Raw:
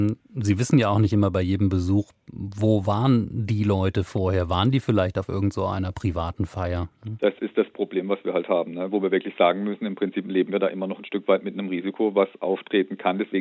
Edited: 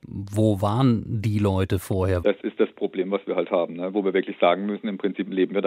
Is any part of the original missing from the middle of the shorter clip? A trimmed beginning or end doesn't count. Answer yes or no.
yes